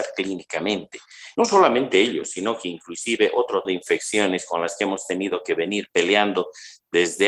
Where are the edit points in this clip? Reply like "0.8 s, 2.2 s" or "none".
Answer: 1.3 s, 3.6 s